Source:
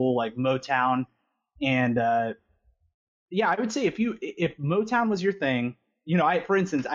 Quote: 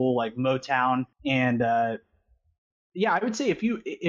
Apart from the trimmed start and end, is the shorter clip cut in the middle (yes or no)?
yes